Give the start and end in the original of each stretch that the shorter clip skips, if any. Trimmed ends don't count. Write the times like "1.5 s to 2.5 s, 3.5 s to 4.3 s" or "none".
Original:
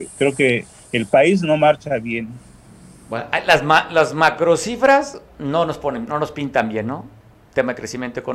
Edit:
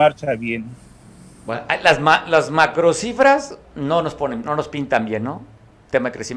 none